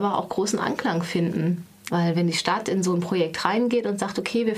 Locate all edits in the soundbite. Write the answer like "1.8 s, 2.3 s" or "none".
1.9 s